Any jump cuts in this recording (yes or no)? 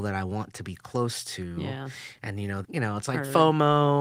yes